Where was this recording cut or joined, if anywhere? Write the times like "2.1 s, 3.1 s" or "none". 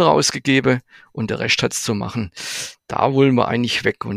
none